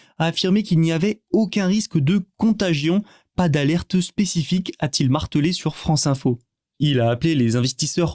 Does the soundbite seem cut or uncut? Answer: uncut